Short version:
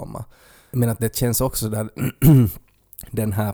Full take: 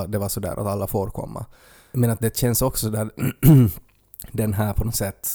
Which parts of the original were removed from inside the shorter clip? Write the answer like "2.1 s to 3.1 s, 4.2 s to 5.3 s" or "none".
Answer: none

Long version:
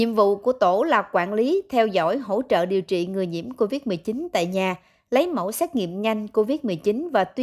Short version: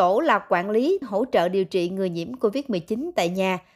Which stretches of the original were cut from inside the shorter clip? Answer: 1.7 s to 2.2 s

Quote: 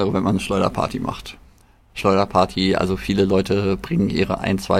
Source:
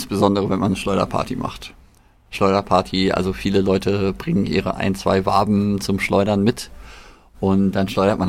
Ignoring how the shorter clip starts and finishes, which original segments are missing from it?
none

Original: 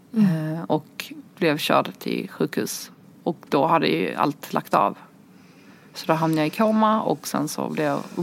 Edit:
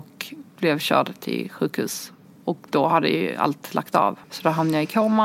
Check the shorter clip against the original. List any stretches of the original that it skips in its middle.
5.0 s to 5.9 s

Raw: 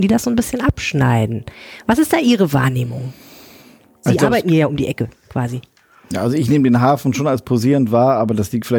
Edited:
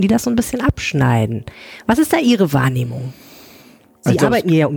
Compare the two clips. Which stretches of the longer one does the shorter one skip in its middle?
none

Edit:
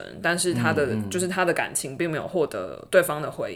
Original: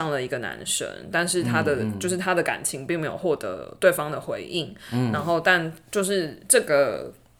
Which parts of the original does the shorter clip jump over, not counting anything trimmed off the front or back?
none

